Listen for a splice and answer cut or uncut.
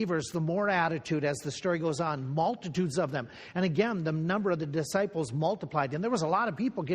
uncut